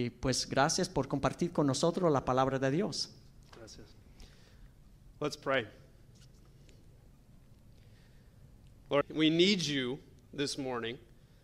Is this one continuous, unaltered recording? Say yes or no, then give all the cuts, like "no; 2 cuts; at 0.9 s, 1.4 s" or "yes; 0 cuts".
no; 1 cut; at 9.0 s